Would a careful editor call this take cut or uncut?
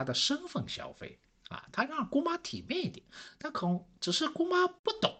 cut